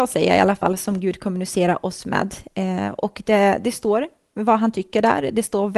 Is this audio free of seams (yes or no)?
yes